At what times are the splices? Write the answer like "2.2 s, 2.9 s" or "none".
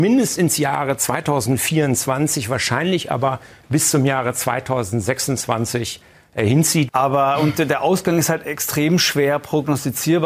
6.9 s